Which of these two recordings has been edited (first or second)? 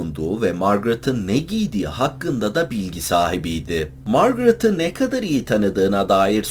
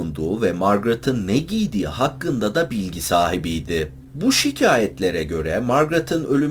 second